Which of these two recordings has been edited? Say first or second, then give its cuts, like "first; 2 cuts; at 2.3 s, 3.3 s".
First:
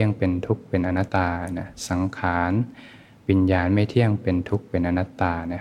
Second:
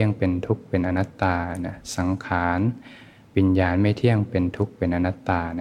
first; 1 cut; at 1.1 s